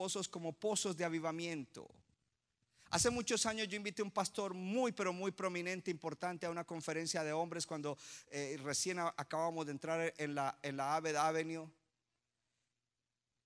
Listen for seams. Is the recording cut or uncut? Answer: uncut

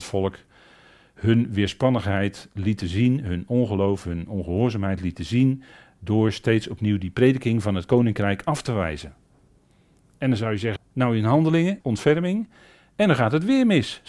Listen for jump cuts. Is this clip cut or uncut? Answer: cut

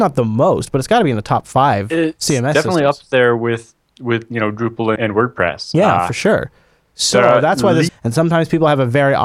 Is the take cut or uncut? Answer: cut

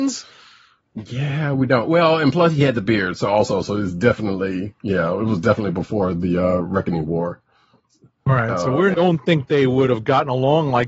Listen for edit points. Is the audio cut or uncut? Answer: cut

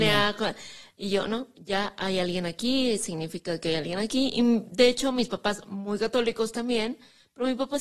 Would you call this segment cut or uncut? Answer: uncut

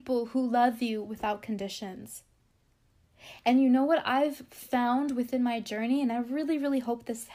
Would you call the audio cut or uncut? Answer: uncut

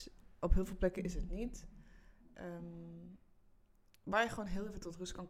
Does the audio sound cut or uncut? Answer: uncut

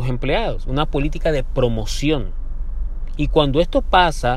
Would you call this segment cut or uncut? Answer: cut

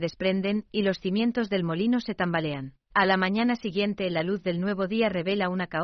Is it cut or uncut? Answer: cut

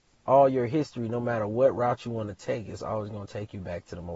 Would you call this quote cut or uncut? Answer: uncut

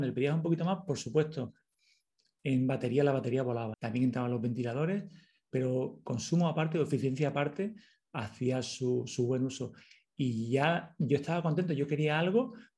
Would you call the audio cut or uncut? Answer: cut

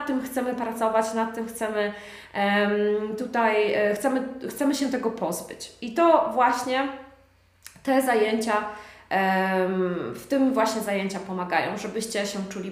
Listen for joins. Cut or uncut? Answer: uncut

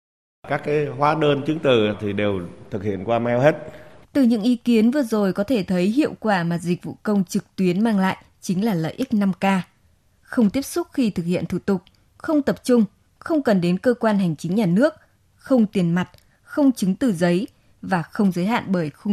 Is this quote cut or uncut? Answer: cut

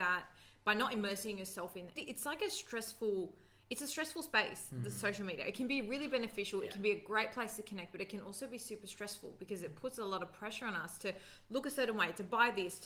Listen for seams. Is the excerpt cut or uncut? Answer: cut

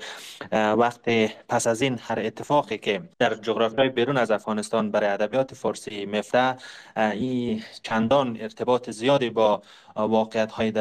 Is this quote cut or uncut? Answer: cut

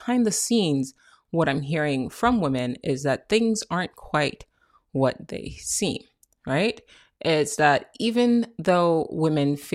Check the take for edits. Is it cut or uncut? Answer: uncut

